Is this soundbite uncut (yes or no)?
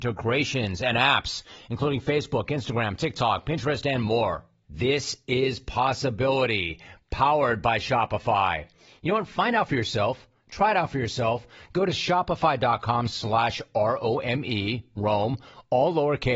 no